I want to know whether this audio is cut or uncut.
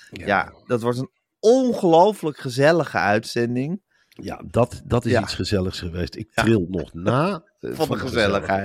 uncut